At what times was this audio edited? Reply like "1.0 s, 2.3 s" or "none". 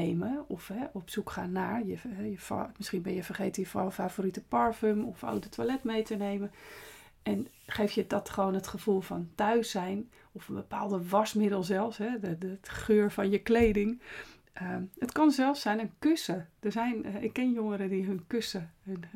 none